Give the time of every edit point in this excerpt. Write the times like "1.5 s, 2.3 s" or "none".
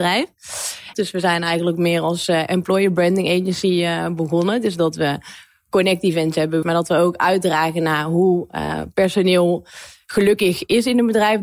0.9 s, 6.6 s